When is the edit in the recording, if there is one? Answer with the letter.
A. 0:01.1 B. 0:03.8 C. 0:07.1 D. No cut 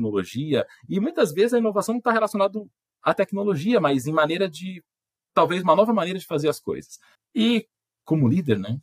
C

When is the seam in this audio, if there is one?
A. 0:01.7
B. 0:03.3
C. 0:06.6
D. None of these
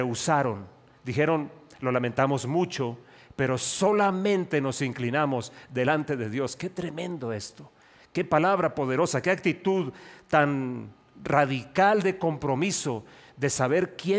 D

